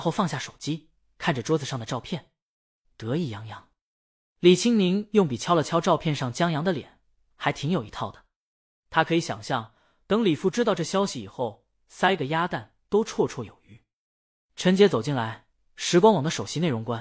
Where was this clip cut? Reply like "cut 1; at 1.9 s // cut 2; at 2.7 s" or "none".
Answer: cut 1; at 2.9 s // cut 2; at 11.8 s // cut 3; at 14.4 s